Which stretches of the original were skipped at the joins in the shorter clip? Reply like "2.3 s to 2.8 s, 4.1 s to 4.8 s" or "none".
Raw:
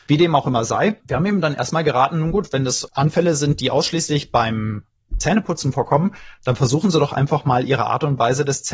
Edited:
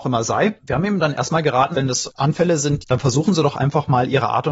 2.1 s to 2.5 s, 3.6 s to 6.4 s